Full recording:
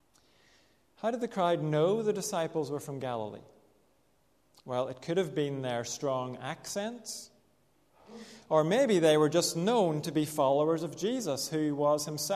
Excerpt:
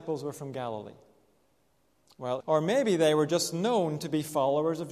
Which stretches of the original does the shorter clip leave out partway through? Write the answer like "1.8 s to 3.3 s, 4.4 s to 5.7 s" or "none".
4.9 s to 8.4 s